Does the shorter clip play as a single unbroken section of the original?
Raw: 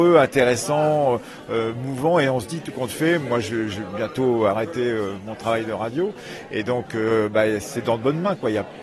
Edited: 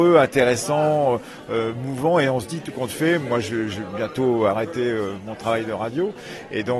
yes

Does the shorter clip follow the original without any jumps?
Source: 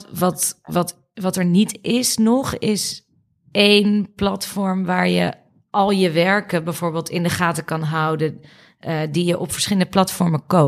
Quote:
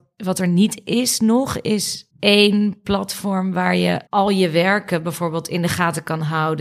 no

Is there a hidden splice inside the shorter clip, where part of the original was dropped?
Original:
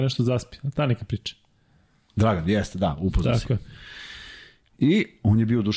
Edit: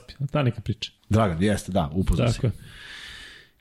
yes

